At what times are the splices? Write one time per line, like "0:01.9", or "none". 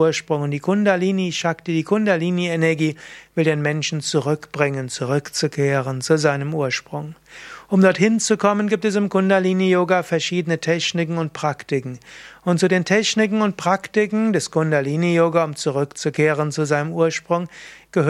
none